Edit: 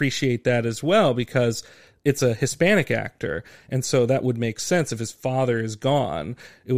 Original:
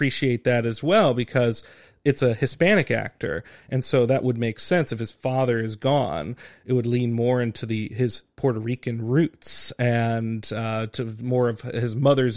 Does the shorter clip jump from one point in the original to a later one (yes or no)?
no